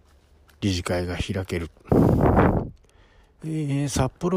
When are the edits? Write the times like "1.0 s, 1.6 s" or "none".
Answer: 3.4 s